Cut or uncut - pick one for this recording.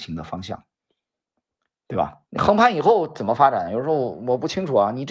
cut